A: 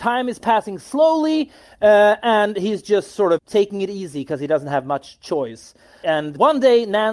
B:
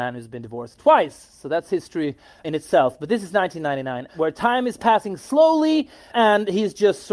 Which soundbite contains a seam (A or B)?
B